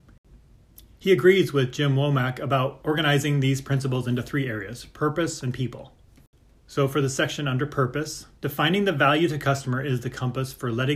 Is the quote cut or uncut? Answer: cut